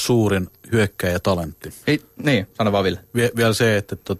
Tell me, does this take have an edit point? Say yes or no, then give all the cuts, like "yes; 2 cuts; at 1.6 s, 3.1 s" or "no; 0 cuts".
yes; 1 cut; at 1.8 s